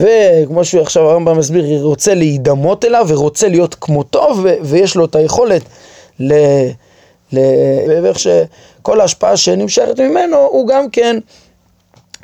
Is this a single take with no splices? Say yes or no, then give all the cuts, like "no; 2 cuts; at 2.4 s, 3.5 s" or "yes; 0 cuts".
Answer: no; 1 cut; at 7.8 s